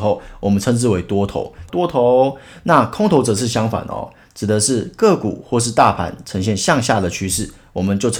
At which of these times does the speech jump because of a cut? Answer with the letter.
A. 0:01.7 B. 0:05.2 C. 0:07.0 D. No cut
A